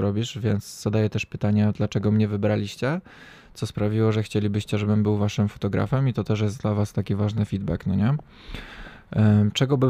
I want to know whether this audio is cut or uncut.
uncut